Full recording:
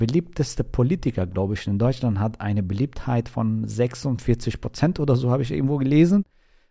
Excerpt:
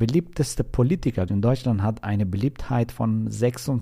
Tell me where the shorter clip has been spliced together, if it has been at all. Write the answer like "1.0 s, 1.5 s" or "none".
1.3 s